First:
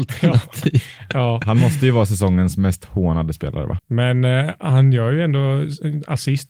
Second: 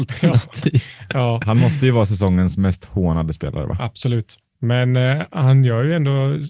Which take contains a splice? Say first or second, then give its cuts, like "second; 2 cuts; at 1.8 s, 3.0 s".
first; 1 cut; at 3.8 s